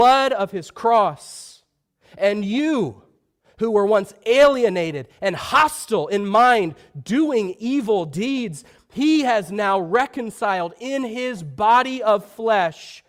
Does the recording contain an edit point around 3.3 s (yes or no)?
no